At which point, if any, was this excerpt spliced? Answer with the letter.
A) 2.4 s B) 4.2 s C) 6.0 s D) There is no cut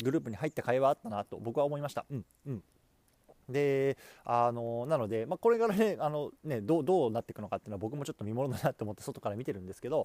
A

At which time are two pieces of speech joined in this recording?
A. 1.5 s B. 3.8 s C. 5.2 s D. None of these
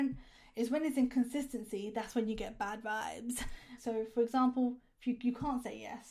B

